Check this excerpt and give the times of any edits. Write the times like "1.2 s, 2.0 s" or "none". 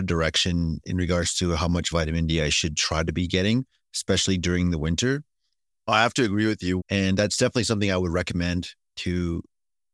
5.7 s, 6.8 s